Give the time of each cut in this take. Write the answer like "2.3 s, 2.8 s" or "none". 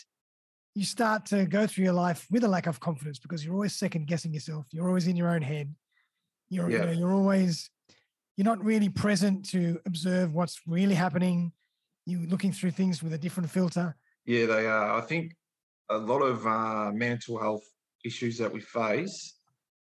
14.1 s